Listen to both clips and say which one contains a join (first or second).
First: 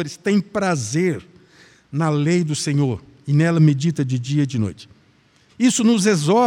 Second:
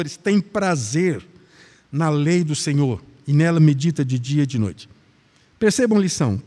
first